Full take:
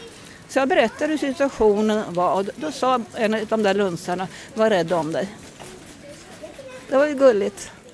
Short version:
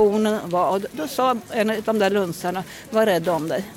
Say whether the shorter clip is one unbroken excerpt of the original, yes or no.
yes